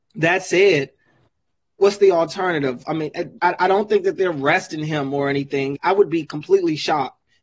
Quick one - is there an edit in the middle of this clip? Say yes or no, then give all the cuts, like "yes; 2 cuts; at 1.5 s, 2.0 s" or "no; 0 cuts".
yes; 2 cuts; at 3.4 s, 5.7 s